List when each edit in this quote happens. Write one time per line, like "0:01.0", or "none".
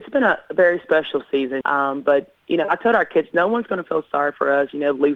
0:01.6